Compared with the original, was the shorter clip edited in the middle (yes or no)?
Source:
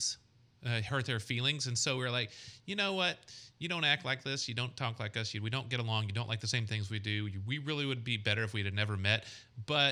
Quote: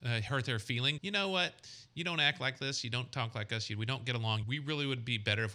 yes